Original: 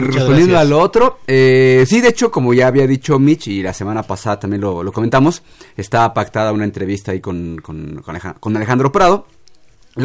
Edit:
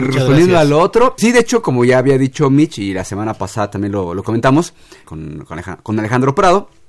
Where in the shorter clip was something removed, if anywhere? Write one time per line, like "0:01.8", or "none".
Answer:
0:01.2
0:05.0